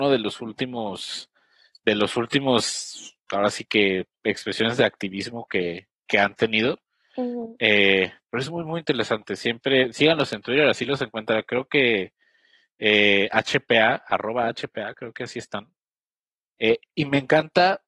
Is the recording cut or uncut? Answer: uncut